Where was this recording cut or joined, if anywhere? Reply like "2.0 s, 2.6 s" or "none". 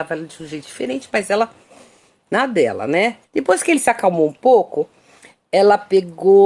3.2 s